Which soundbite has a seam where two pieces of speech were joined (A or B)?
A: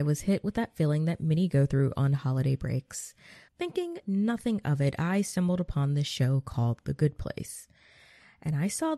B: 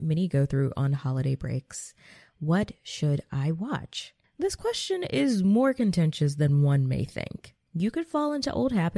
A